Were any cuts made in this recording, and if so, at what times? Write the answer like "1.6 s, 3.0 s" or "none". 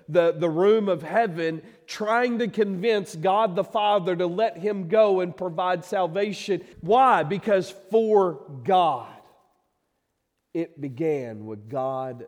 6.7 s